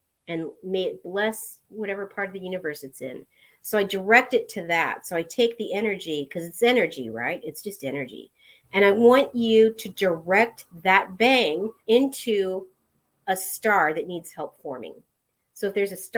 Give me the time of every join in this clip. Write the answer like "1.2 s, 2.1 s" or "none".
8.6 s, 11.8 s